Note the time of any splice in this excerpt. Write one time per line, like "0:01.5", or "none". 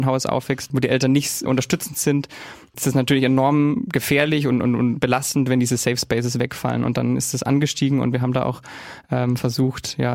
0:01.5